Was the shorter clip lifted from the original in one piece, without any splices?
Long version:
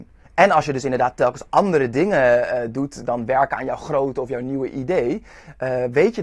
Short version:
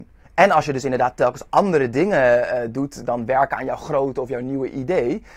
yes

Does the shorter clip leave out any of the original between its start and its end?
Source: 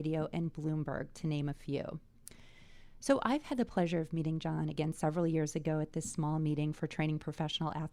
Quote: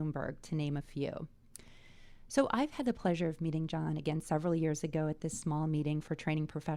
no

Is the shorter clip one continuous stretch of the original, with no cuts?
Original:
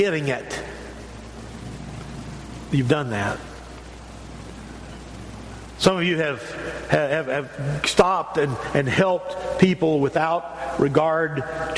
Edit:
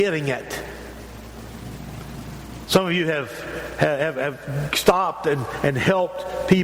no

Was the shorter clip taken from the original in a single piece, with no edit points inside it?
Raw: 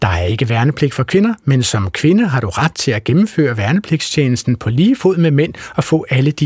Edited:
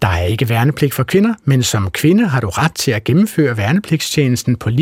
yes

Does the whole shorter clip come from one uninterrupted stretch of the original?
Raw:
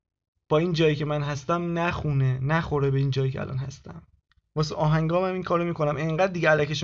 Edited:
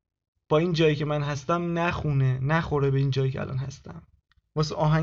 yes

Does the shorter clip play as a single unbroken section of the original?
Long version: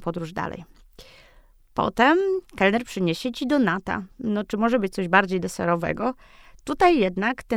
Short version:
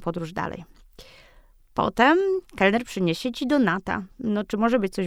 yes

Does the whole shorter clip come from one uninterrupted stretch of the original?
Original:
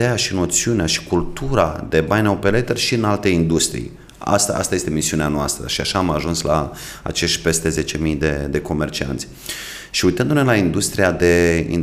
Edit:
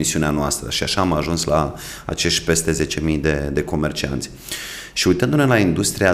yes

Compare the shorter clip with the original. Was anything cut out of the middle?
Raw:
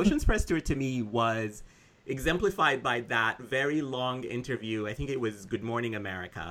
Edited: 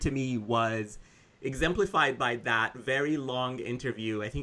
no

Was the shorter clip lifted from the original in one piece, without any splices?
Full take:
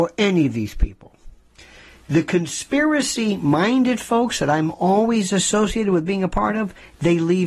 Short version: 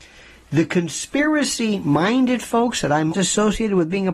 no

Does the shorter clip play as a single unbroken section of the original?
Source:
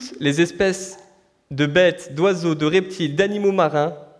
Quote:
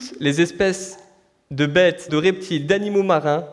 no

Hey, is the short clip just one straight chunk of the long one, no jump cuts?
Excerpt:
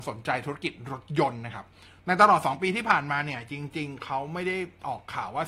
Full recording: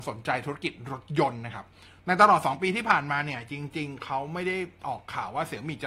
yes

